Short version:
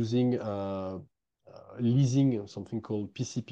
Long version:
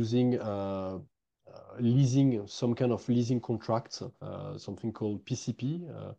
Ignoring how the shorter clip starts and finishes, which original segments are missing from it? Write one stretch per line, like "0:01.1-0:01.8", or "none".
0:02.5-0:04.6